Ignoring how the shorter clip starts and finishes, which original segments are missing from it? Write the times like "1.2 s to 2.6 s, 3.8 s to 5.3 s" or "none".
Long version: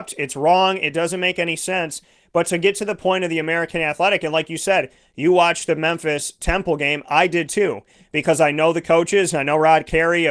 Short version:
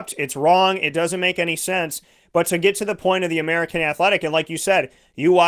none